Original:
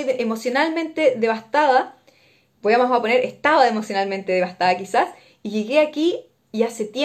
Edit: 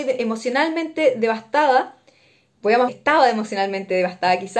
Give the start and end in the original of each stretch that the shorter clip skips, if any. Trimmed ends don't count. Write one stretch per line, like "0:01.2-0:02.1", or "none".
0:02.9-0:03.3